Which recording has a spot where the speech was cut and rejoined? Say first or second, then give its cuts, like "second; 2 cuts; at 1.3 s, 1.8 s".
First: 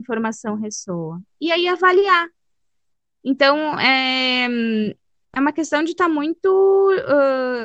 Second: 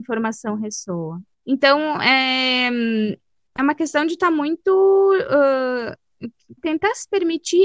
second; 2 cuts; at 1.3 s, 6.6 s